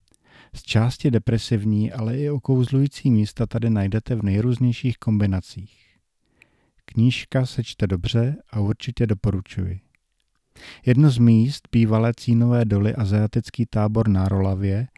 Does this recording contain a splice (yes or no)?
no